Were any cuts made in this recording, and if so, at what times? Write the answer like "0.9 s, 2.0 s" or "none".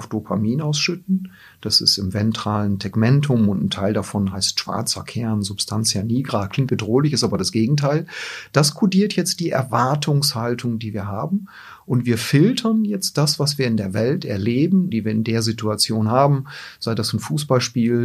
6.7 s, 14.9 s

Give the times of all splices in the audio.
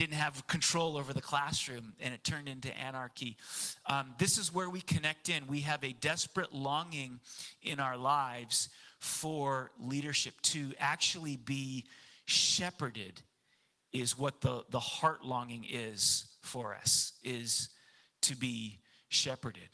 none

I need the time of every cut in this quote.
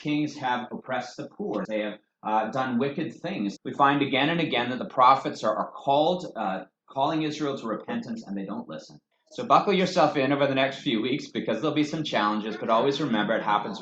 1.6 s, 3.6 s, 9.1 s

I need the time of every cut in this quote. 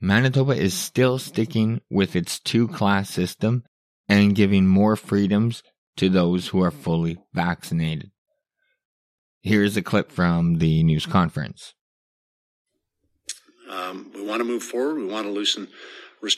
none

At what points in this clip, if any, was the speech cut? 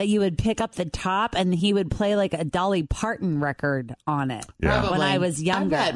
none

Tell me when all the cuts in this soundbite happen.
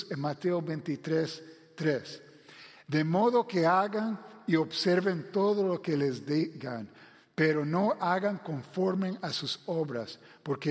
none

